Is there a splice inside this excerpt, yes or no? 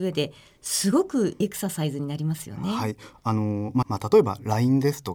yes